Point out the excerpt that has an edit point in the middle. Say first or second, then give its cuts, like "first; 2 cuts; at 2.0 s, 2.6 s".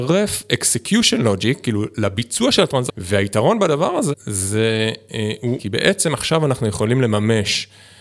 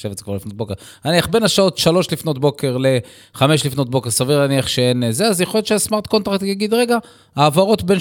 first; 3 cuts; at 2.9 s, 4.1 s, 5.6 s